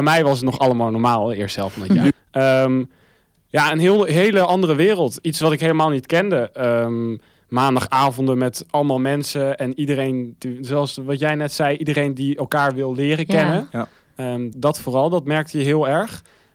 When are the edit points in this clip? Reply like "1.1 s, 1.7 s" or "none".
14.5 s

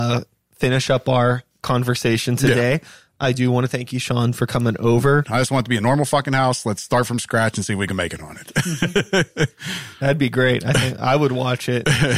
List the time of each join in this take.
5.2 s

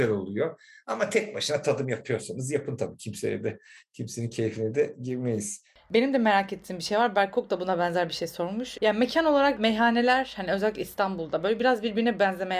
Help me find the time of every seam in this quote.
8.8 s

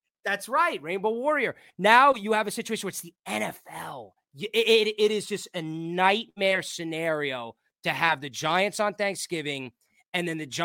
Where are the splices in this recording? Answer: none

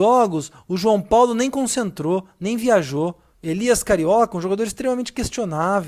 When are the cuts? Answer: 3.3 s

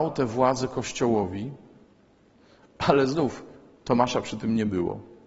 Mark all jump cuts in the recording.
none

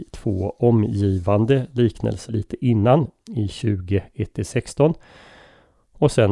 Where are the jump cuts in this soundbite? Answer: 2.3 s

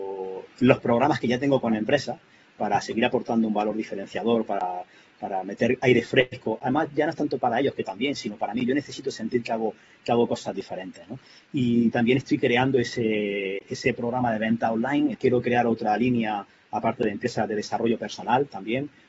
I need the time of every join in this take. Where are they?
15.1 s

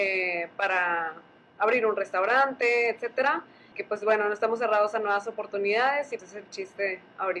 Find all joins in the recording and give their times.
3.7 s, 6.2 s

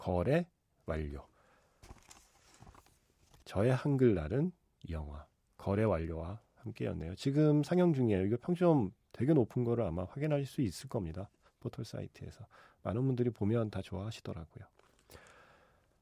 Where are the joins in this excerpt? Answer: none

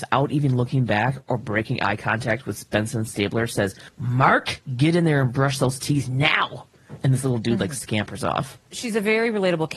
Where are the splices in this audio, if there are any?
none

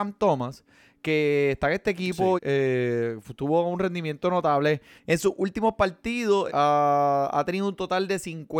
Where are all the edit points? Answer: 2.4 s, 5.0 s, 6.5 s

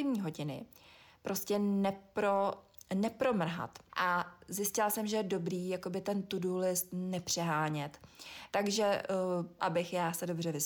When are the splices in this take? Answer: 3.9 s, 8.5 s, 9.6 s

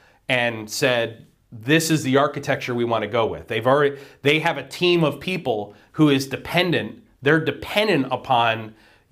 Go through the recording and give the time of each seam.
none

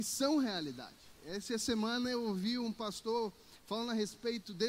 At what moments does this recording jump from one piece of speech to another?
1.2 s

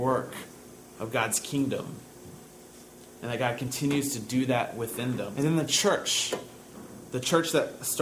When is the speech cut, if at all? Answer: 5.3 s

